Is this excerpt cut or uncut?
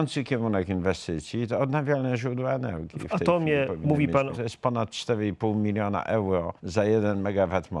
cut